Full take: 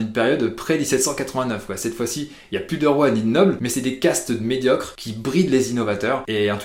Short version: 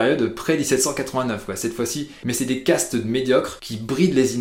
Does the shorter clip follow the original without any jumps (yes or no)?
no